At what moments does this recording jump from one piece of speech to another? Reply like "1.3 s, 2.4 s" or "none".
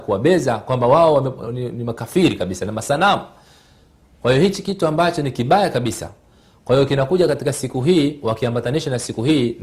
none